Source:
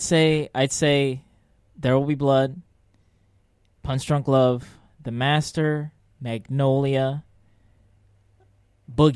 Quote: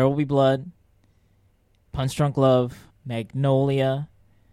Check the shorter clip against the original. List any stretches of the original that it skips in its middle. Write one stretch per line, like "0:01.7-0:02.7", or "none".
0:04.8-0:06.1